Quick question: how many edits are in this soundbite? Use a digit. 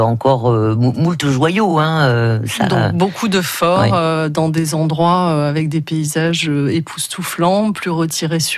0